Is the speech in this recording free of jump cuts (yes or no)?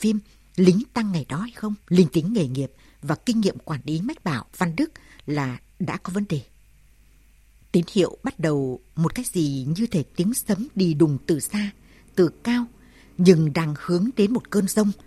no